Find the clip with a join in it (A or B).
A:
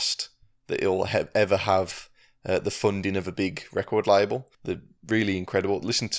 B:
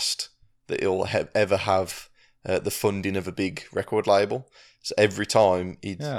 A